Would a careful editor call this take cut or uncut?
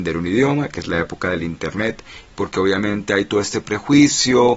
cut